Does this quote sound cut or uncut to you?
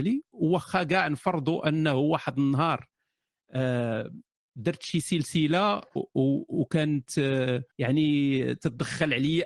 cut